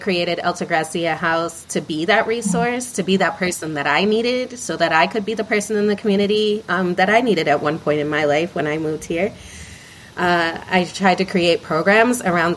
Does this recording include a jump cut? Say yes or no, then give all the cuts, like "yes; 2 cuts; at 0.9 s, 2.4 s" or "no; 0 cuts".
no; 0 cuts